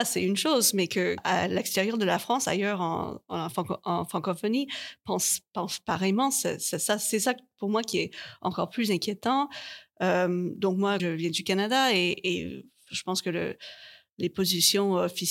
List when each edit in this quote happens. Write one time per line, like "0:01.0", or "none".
0:01.2
0:11.0